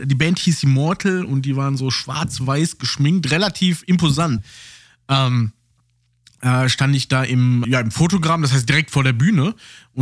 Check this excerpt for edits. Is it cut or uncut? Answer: cut